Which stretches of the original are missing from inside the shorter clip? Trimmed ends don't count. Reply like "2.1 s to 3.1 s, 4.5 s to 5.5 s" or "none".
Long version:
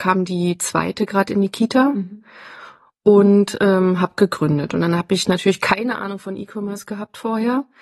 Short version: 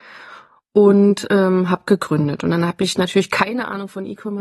none